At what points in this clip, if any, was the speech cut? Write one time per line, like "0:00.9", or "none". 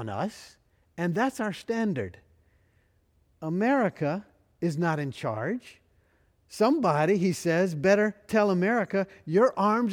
none